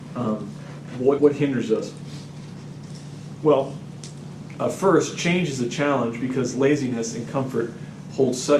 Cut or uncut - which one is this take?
cut